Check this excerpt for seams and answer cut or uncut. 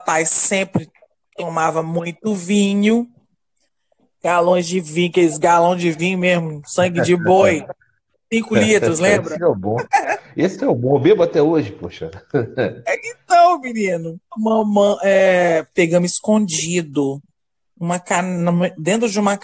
uncut